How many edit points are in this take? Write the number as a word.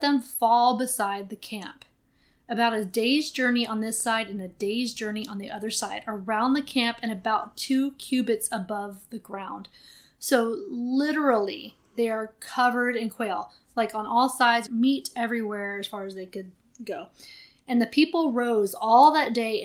one